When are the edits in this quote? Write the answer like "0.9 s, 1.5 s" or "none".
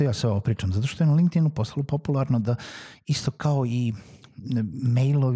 none